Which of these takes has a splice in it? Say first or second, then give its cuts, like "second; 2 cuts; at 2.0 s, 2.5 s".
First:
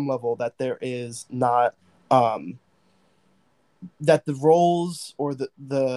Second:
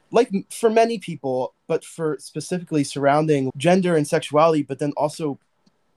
second; 2 cuts; at 1.5 s, 3.5 s